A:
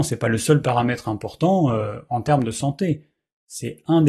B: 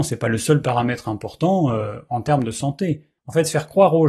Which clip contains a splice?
B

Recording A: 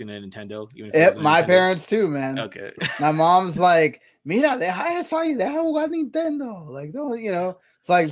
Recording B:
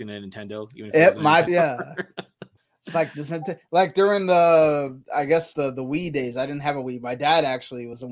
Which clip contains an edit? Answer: B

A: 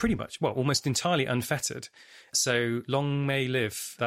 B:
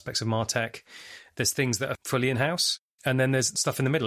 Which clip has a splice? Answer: B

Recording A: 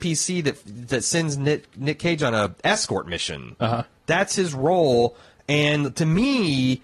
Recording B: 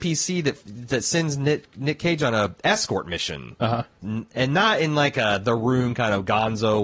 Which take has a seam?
B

